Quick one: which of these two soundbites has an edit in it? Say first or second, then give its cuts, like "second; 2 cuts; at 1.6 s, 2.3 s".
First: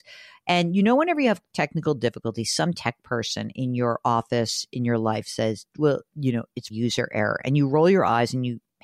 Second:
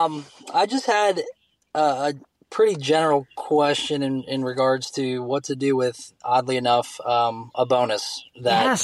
first; 1 cut; at 6.7 s